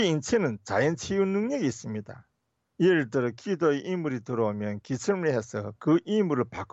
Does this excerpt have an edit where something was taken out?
no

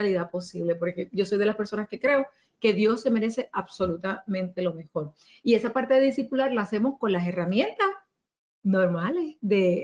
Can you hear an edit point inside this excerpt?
no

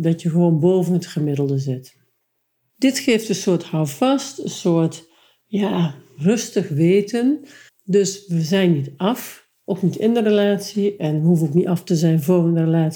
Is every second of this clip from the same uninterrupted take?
no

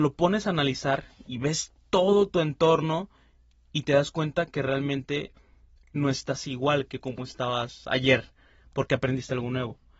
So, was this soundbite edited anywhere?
no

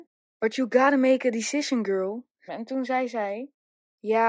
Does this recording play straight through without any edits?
no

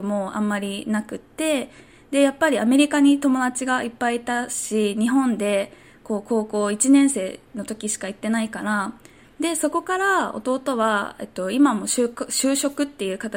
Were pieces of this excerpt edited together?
yes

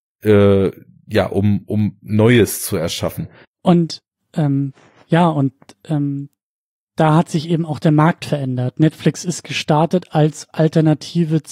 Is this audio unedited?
no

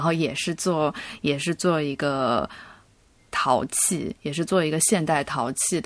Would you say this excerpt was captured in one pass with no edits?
yes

